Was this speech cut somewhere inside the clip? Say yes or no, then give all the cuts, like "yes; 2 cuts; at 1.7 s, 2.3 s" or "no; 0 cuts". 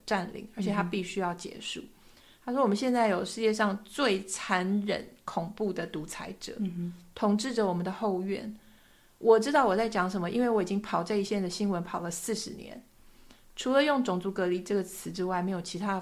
no; 0 cuts